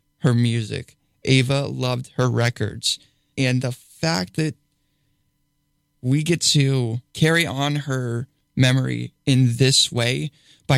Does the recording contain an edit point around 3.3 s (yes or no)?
yes